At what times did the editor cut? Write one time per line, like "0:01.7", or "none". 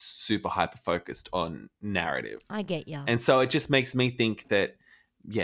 none